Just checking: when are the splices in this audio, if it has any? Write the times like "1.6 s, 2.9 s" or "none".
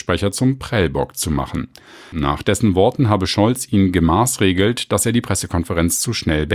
2.1 s